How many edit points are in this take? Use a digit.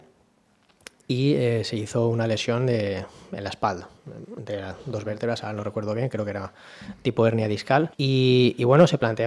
1